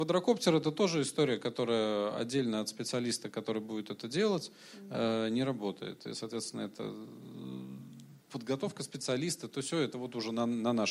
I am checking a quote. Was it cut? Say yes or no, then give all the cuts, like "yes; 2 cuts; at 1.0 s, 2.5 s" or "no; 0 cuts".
no; 0 cuts